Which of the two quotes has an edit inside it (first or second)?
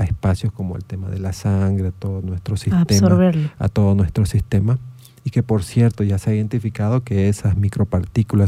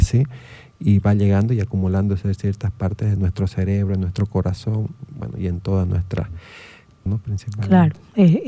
second